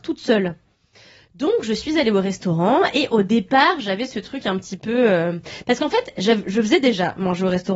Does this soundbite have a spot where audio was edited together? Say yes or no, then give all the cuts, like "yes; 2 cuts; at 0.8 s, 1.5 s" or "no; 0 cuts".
no; 0 cuts